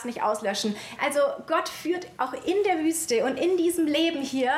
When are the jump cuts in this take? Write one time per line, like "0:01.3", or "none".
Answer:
0:01.0